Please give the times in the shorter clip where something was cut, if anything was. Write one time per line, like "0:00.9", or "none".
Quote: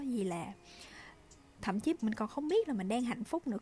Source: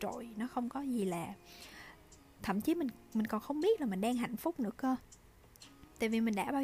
0:01.9